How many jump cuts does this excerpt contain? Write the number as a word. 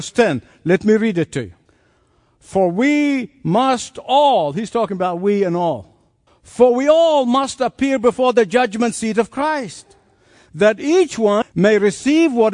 two